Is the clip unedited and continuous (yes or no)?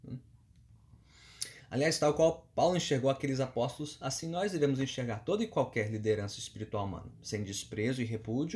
yes